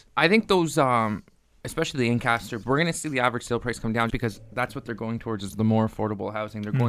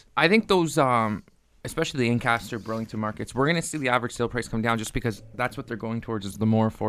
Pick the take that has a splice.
first; 2 cuts; at 2.6 s, 4.1 s

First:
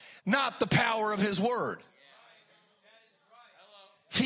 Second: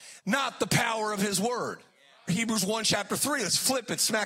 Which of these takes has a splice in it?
second; 1 cut; at 2.3 s

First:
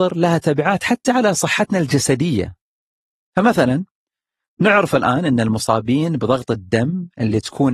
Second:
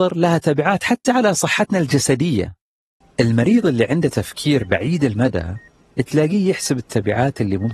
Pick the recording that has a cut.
second; 1 cut; at 3.0 s

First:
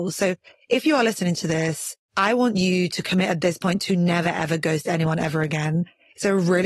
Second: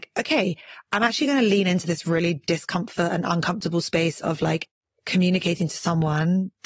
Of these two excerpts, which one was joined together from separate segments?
first; 2 cuts; at 2.0 s, 4.2 s

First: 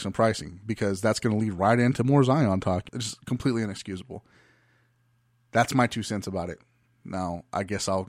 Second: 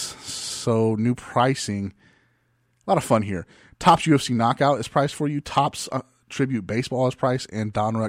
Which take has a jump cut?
first; 1 cut; at 2.9 s

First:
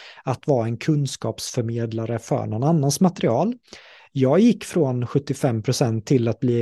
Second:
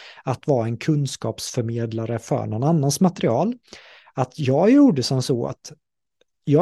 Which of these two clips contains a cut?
first; 1 cut; at 4.0 s

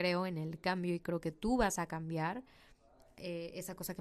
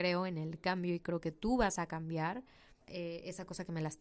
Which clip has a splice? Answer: second; 1 cut; at 2.8 s

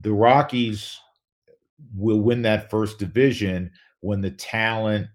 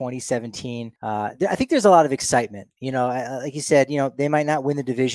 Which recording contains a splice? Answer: second; 1 cut; at 1.0 s

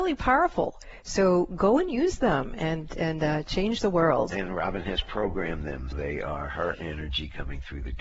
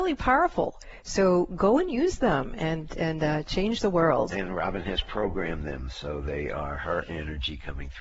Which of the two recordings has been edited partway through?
first; 1 cut; at 5.9 s

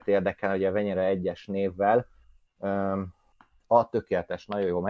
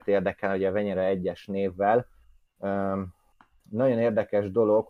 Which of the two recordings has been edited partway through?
first; 1 cut; at 3.6 s

